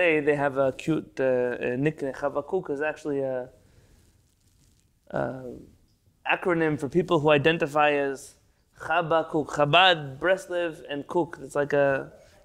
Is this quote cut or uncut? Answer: uncut